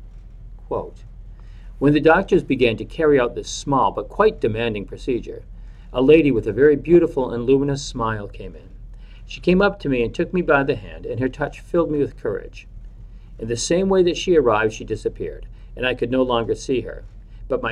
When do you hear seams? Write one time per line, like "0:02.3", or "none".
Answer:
none